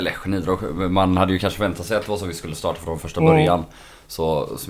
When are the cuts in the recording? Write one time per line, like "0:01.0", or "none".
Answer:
none